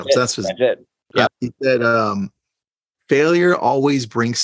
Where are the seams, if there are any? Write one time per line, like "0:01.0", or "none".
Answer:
0:01.3